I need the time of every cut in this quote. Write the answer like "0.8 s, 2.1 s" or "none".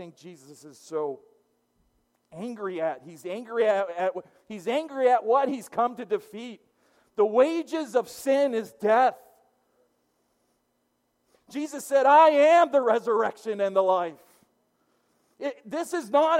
none